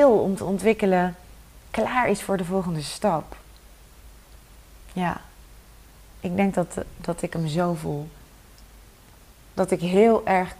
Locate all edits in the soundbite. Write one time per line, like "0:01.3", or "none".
none

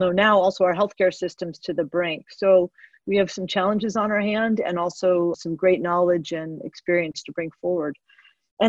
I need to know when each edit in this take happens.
0:05.3

